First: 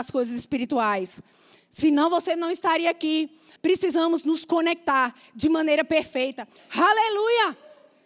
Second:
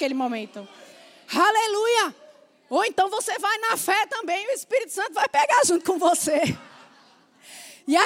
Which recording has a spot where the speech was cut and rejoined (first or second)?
first